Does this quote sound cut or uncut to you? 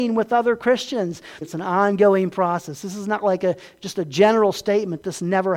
cut